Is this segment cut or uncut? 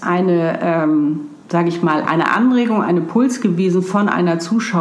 uncut